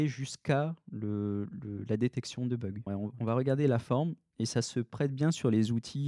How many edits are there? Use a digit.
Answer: 1